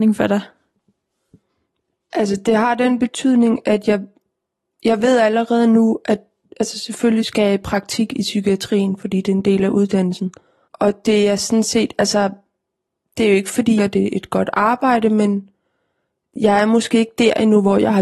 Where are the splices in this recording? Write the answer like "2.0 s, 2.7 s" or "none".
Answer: 10.7 s, 13.8 s